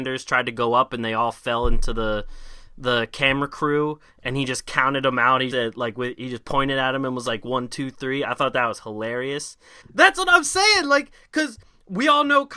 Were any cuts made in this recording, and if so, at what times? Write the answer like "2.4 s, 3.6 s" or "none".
5.5 s, 9.8 s